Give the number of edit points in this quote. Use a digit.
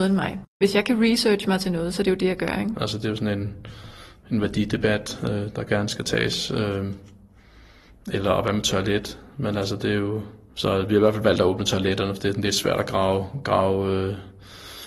1